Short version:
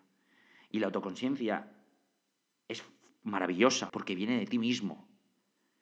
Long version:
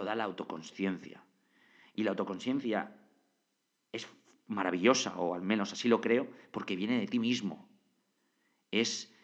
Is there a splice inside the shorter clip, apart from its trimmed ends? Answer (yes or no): yes